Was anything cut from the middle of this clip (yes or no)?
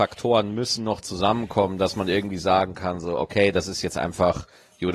no